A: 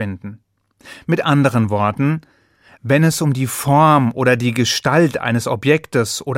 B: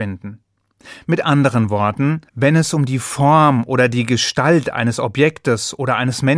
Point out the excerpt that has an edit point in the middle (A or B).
B